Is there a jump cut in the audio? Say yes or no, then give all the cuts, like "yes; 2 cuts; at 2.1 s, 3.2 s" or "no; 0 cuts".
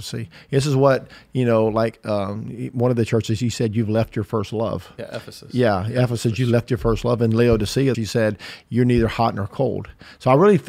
yes; 1 cut; at 7.9 s